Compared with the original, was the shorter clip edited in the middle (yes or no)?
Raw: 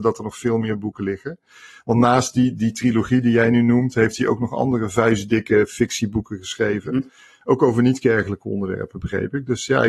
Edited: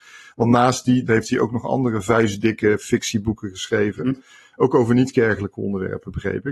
yes